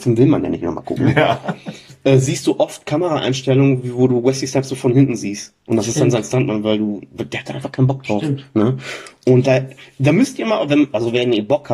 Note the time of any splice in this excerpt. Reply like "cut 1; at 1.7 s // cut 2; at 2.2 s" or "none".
none